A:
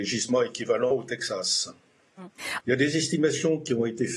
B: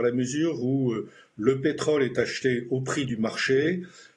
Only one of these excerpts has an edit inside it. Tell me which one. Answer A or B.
A